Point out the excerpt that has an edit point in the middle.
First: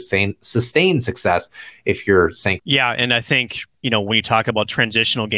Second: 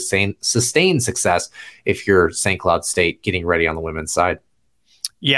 first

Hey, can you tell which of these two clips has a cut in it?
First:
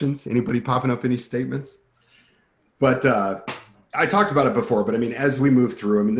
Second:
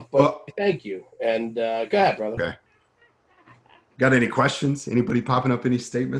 second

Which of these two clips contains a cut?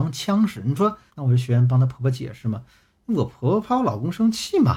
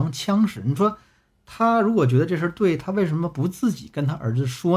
first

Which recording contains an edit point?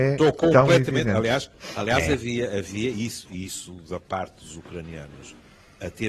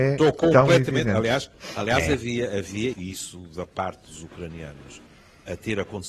second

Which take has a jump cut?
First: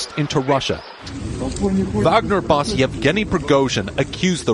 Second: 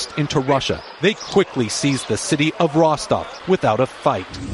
first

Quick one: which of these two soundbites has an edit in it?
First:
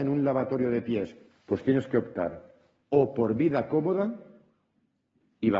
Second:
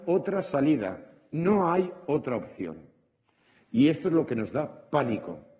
first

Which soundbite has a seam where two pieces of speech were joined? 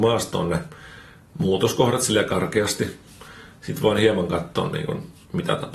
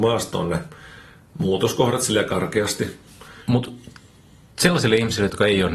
second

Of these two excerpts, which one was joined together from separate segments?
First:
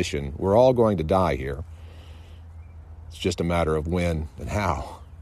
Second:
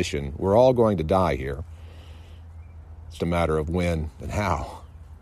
second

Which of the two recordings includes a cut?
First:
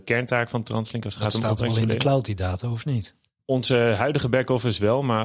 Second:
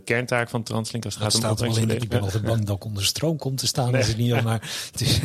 second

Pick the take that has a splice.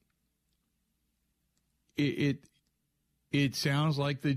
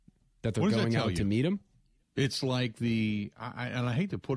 second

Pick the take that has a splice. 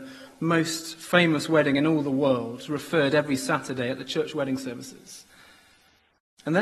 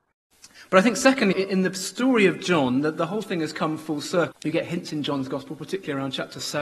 second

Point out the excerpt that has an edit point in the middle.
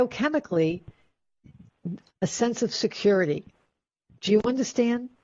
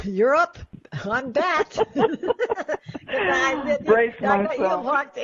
first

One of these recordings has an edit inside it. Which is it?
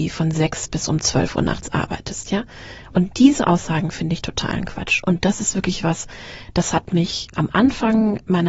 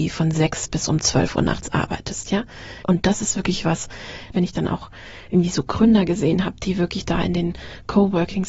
second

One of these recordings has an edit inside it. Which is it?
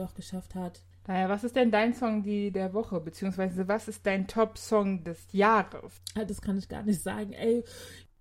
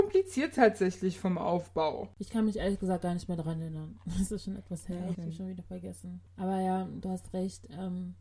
second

